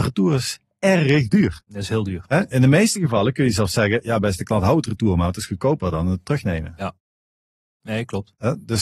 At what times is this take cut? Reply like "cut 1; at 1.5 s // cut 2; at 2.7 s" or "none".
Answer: none

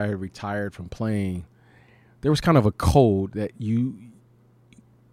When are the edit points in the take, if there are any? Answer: none

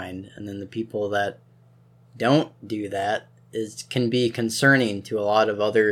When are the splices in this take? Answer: none

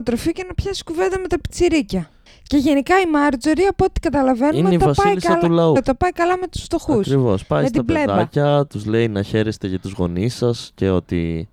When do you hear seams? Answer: cut 1; at 5.8 s // cut 2; at 8.7 s

